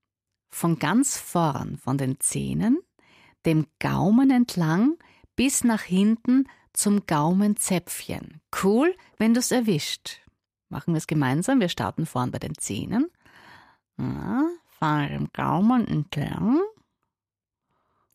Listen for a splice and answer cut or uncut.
uncut